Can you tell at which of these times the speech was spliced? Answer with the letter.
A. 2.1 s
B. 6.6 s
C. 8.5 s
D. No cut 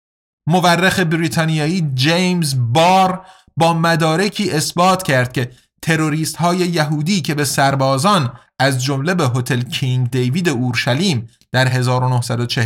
C